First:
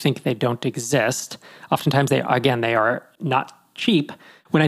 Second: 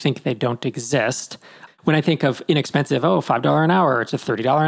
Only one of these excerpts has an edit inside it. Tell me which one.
second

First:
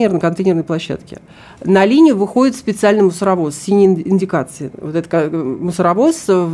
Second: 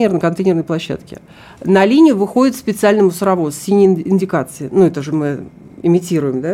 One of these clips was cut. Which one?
first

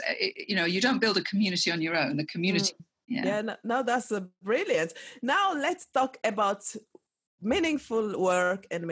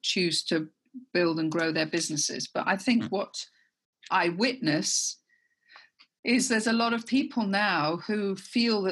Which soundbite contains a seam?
first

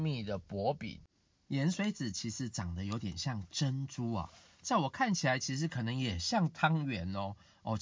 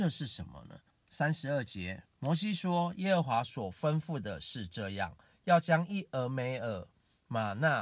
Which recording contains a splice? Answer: second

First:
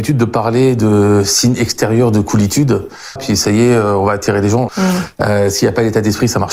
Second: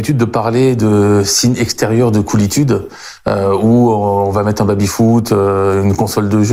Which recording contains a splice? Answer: first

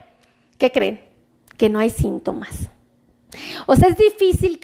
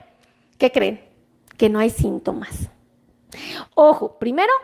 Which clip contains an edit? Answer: second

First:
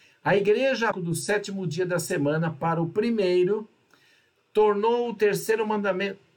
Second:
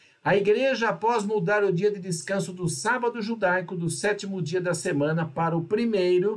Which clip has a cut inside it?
first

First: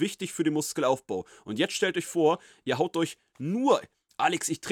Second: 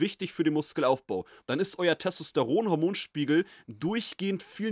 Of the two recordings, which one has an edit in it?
second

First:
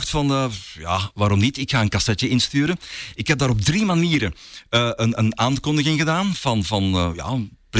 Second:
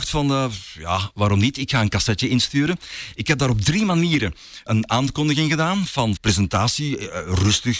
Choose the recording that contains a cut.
second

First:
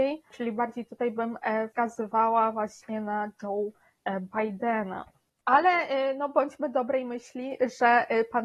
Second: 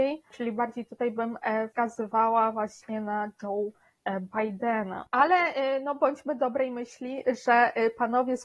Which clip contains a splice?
second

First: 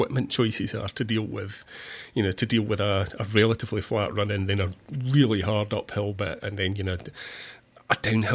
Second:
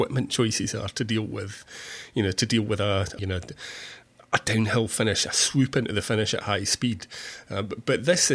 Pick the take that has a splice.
second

